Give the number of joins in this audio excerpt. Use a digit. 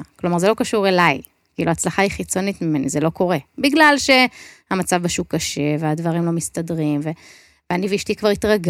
0